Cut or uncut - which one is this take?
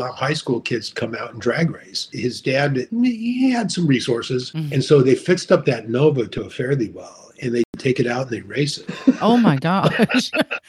cut